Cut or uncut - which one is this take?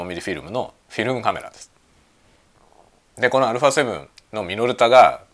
uncut